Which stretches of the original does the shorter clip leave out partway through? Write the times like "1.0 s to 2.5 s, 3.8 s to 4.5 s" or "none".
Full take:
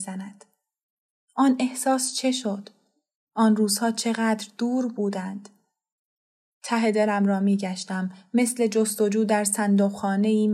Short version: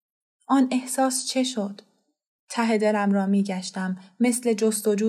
3.3 s to 6.5 s